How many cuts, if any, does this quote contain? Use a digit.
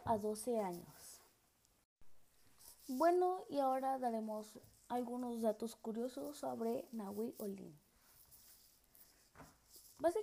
1